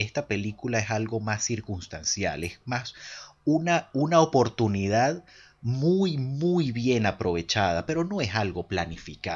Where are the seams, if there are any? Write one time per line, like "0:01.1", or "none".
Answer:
none